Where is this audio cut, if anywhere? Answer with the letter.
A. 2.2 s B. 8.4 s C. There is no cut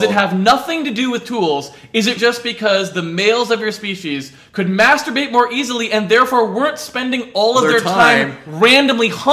A